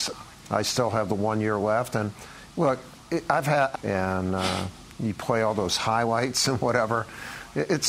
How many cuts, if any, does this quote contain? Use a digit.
1